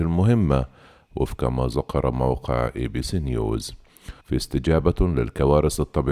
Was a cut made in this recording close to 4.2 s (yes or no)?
yes